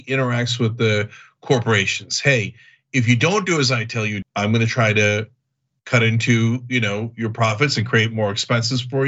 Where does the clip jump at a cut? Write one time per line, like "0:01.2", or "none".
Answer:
0:04.2